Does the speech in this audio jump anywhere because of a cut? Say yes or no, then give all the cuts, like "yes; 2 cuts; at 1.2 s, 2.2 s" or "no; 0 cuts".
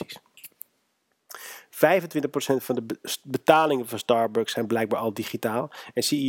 no; 0 cuts